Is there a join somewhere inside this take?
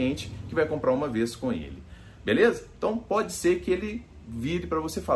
no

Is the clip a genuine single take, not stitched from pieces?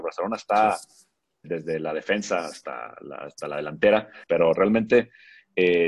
no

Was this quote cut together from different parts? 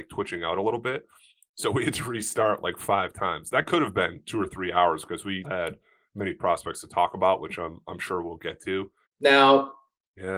yes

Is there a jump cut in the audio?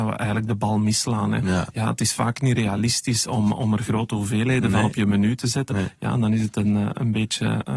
no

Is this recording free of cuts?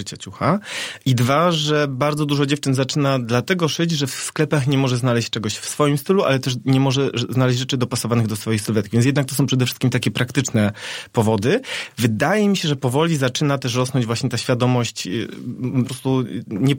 no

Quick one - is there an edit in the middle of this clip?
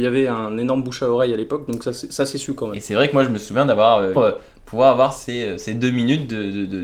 yes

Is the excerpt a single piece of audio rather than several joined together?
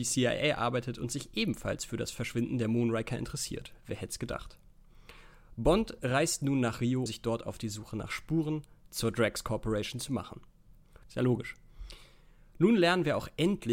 no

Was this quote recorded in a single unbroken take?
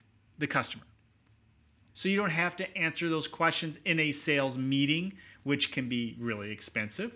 no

